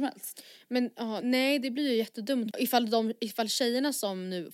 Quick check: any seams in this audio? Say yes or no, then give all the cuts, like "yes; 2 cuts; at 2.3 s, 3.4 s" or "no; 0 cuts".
yes; 2 cuts; at 1.2 s, 2.5 s